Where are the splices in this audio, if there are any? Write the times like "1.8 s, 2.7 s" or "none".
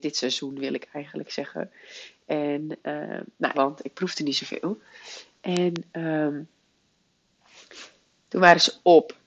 3.5 s